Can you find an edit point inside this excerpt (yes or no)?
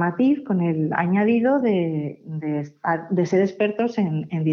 no